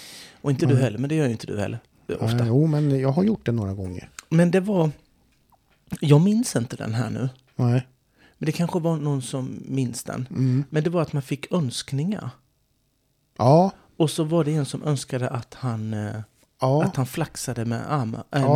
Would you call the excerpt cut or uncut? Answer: uncut